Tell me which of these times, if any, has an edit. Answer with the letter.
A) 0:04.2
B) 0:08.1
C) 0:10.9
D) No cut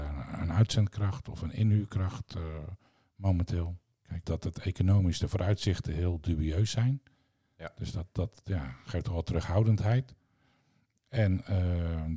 A